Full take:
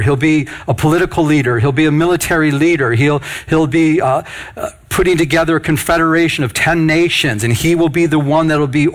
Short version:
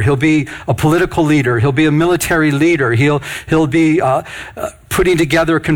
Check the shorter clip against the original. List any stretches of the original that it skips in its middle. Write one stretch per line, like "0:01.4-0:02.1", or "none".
none

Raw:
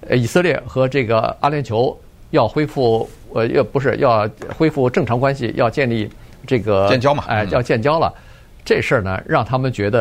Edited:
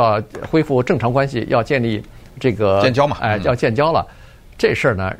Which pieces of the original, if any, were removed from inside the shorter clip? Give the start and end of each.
none

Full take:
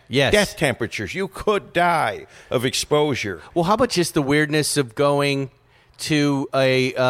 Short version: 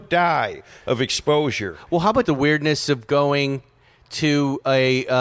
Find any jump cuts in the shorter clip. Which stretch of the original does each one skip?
0:03.9-0:04.1

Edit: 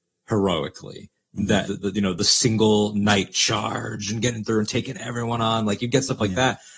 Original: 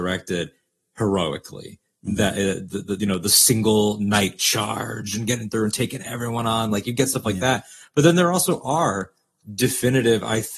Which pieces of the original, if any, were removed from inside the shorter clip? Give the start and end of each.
0:02.3-0:02.7

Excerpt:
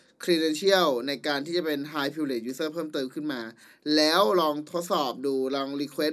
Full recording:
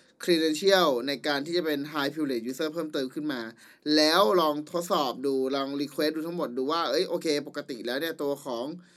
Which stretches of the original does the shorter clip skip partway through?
none

